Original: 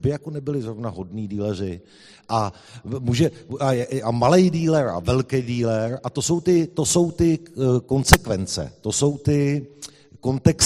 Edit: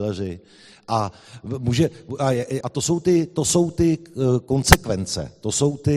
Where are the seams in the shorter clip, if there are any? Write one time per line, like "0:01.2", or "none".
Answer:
0:02.6